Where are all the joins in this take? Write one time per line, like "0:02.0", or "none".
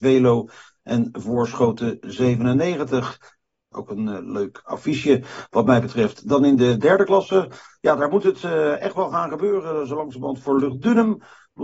0:03.7